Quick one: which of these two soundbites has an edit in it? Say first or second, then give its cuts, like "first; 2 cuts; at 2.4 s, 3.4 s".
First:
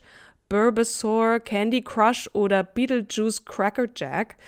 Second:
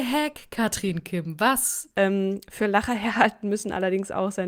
second; 1 cut; at 1.9 s